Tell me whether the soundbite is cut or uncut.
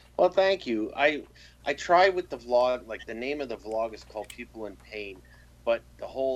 uncut